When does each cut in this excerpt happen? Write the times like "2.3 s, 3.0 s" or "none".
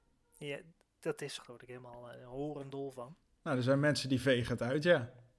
1.4 s